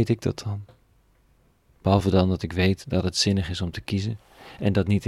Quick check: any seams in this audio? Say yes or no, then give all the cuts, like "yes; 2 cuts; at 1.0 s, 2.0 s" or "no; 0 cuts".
yes; 1 cut; at 1.7 s